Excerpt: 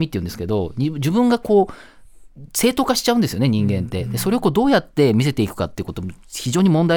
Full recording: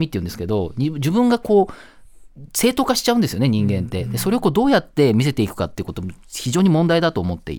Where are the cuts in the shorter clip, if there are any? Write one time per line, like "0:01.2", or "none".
none